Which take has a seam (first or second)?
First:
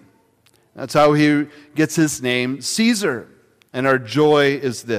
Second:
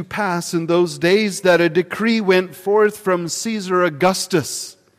first